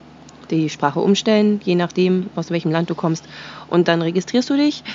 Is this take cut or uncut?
uncut